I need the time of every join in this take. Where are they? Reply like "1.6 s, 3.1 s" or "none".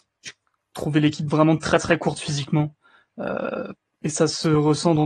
none